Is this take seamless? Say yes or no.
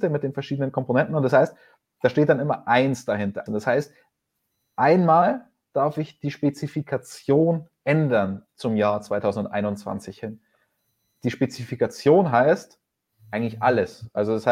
no